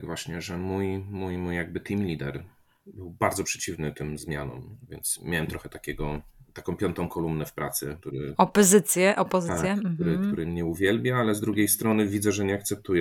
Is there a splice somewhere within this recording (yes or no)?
yes